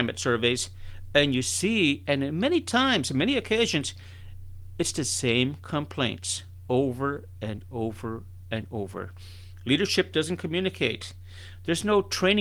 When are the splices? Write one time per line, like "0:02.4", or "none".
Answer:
none